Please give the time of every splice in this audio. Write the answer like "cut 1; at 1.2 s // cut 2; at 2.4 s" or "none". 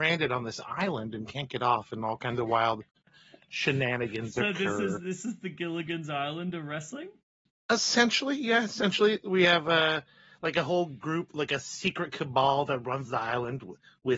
none